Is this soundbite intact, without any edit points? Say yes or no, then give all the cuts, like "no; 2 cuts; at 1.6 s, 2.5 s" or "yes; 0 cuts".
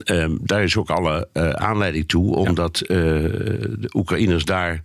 yes; 0 cuts